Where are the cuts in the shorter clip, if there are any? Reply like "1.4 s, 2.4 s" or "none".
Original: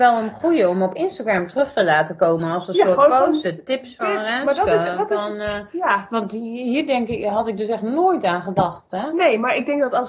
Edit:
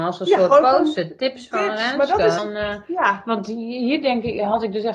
2.4 s